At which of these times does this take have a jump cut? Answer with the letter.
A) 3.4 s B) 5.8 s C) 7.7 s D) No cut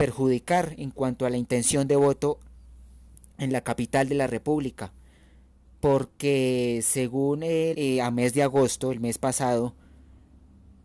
C